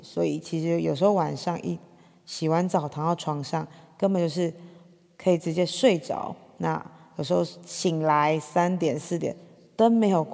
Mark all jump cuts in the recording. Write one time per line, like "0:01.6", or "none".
none